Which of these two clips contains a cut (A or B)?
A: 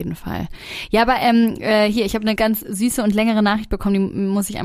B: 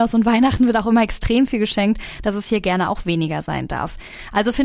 A